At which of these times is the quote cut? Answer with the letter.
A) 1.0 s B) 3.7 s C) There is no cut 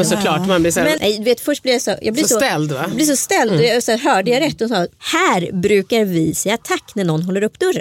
A